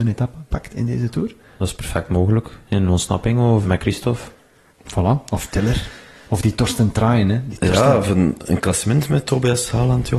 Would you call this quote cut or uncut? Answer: cut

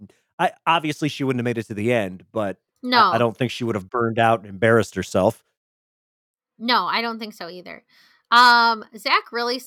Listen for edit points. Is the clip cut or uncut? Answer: uncut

